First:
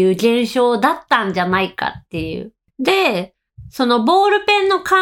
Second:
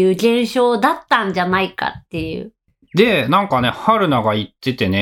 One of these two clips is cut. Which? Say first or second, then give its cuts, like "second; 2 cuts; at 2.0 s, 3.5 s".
first; 1 cut; at 2.7 s